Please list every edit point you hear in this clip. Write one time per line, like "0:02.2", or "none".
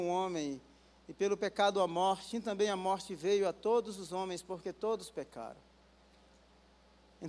0:02.3